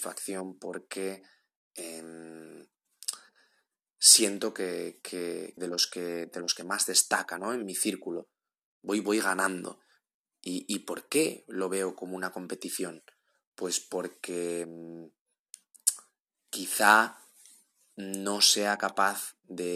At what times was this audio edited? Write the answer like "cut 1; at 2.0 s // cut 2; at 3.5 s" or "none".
cut 1; at 5.6 s